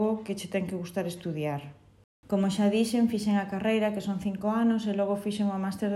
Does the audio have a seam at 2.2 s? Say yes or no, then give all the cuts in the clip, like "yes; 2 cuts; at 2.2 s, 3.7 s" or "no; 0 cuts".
yes; 1 cut; at 2.2 s